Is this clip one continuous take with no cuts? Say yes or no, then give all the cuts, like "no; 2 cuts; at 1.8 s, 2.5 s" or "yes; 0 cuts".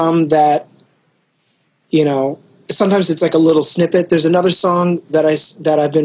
yes; 0 cuts